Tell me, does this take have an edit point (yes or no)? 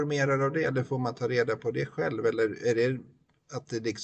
no